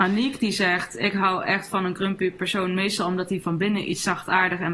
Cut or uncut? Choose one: uncut